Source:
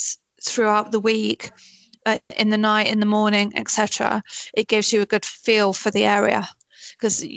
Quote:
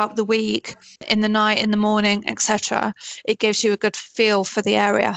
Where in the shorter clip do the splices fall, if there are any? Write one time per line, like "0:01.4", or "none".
0:01.0